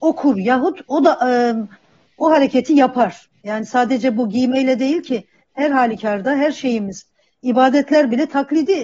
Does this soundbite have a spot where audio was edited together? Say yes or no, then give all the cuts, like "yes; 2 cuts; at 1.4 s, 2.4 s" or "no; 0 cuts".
no; 0 cuts